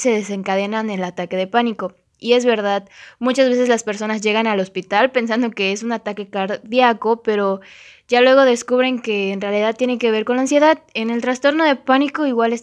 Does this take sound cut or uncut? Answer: uncut